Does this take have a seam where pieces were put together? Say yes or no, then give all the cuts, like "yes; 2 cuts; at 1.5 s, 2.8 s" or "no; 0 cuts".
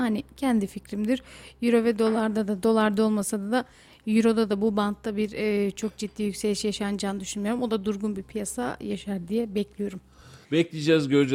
yes; 1 cut; at 10.4 s